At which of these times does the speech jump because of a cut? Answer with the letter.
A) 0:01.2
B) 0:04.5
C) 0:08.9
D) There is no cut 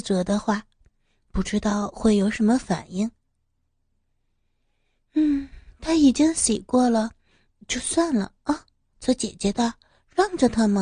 C